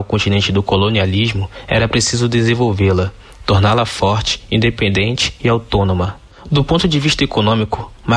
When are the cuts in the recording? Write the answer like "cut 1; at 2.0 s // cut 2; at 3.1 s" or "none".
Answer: none